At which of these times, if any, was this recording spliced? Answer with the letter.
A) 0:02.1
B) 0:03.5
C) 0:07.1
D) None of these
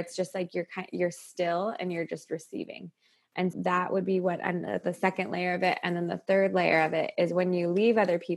B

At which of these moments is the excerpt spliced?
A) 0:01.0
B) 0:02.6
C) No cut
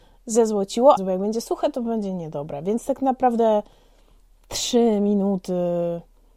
A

